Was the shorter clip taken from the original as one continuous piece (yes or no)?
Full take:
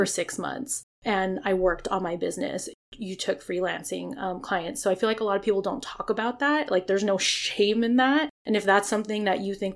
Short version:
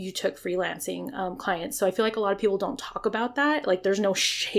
yes